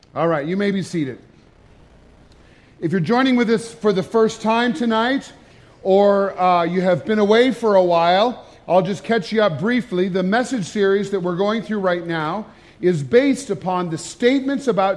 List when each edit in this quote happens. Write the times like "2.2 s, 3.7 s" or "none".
none